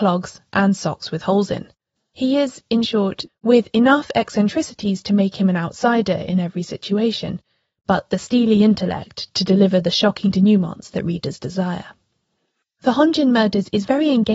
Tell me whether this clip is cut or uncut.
cut